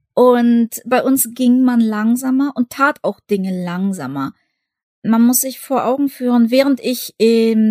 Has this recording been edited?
no; 0 cuts

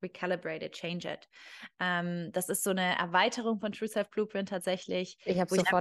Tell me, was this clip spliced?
yes; 1 cut; at 1.7 s

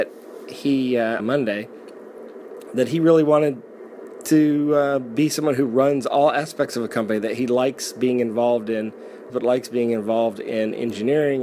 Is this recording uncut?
no; 2 cuts; at 1.2 s, 9.3 s

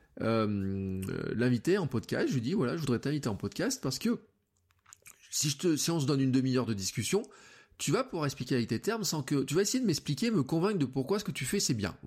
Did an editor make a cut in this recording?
no; 0 cuts

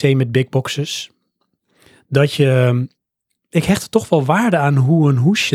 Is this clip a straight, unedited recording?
yes; 0 cuts

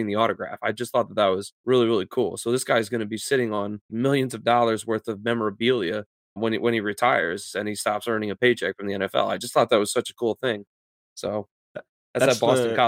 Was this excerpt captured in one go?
no; 3 cuts; at 1.5 s, 3.9 s, 6.4 s

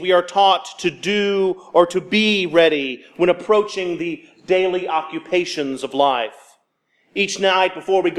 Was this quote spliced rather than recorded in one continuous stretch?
no; 0 cuts

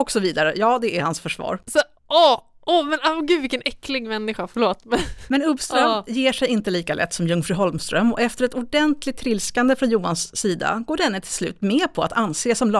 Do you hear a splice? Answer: no; 0 cuts

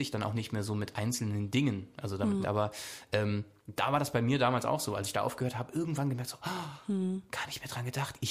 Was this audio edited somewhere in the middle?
yes; 1 cut; at 2.4 s

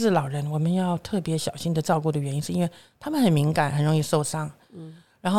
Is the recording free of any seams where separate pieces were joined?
yes; 0 cuts

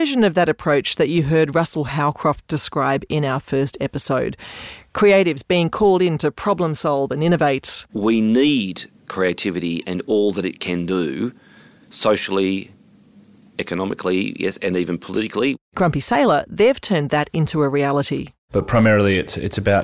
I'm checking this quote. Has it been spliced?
no; 0 cuts

